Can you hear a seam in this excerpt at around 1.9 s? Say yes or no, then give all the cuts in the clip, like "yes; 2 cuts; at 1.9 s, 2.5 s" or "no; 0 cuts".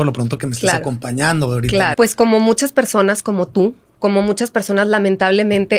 yes; 2 cuts; at 1.9 s, 3.9 s